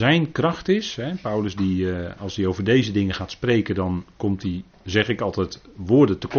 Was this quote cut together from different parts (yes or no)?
no